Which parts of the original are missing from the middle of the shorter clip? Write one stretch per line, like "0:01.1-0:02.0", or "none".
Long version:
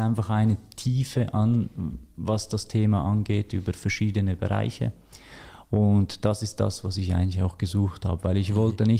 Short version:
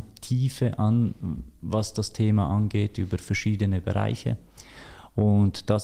none